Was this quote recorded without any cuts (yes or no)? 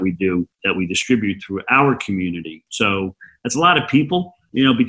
no